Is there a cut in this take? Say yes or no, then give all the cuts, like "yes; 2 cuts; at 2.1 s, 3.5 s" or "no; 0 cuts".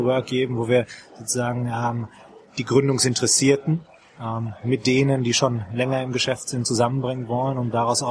no; 0 cuts